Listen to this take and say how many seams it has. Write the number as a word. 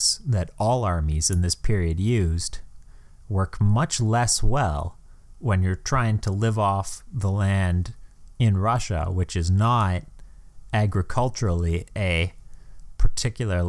zero